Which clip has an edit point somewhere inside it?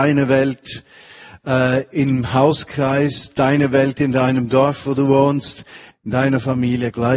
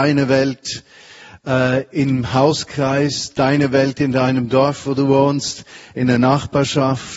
first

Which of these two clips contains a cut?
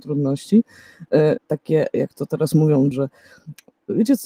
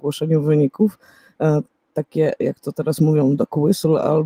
first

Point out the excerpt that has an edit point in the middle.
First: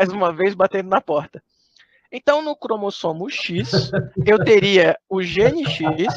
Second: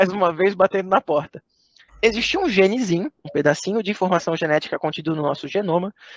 second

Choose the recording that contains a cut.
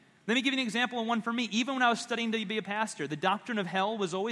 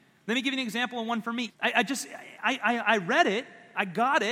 second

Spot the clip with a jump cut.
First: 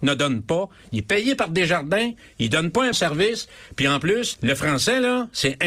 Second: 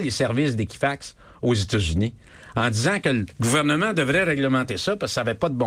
first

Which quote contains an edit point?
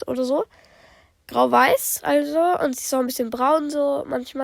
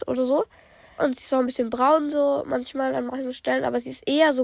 second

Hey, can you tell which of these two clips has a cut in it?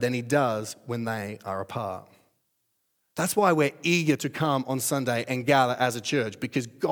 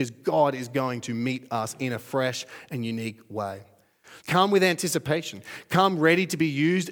second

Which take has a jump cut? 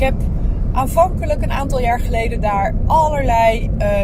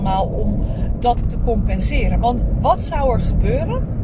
second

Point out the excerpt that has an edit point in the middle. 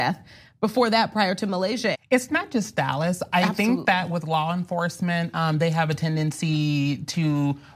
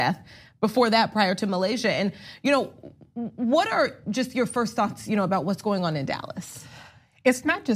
first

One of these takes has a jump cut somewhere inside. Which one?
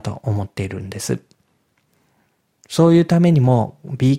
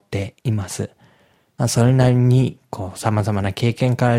second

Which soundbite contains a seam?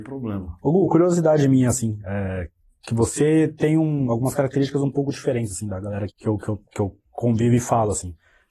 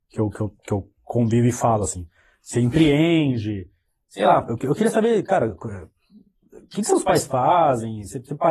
first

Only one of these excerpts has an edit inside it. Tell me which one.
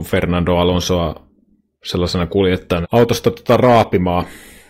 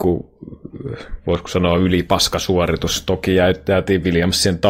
first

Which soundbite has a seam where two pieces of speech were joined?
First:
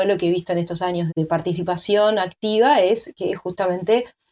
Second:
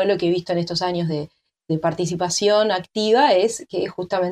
first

